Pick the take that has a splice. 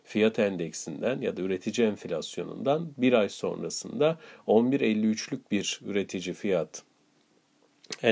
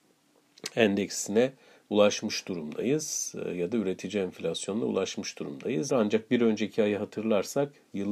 second; 1 cut; at 5.9 s

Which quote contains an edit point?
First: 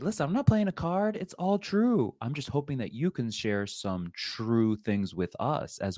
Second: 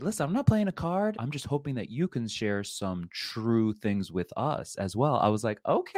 second; 1 cut; at 1.1 s

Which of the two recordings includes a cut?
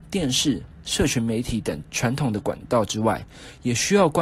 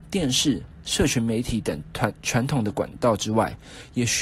first; 1 cut; at 1.8 s

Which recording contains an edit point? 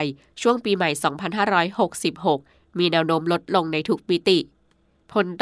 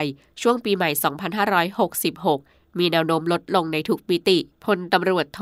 second; 1 cut; at 4.5 s

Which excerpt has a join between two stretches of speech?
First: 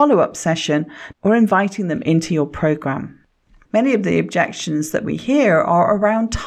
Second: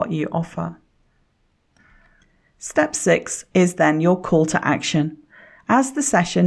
first; 2 cuts; at 1.1 s, 3.7 s

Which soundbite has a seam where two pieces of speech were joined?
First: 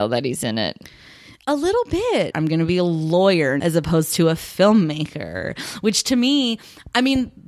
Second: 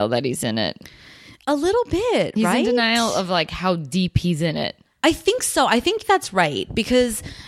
first; 2 cuts; at 2.3 s, 3.6 s

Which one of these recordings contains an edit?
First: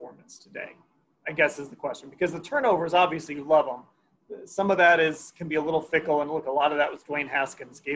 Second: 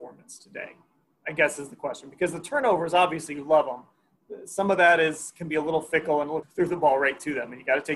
second; 1 cut; at 6.4 s

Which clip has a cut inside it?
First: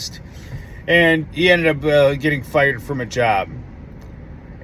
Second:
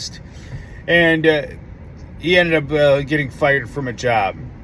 first; 1 cut; at 1.2 s

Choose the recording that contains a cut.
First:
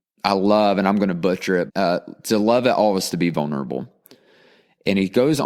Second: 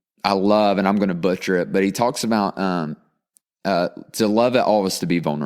first; 1 cut; at 1.7 s

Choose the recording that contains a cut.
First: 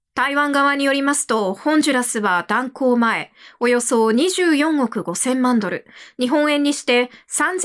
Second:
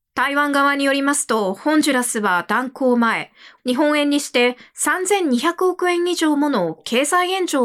second; 1 cut; at 3.6 s

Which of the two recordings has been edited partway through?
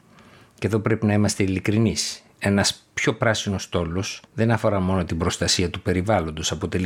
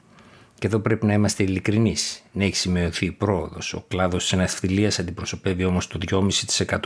first; 2 cuts; at 2.3 s, 4.2 s

